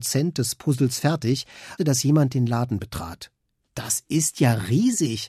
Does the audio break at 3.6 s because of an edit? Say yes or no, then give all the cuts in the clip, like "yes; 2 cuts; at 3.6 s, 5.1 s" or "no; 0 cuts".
yes; 2 cuts; at 1.8 s, 3.6 s